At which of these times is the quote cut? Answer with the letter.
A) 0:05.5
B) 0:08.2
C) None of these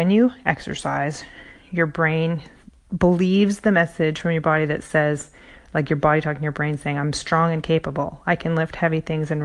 C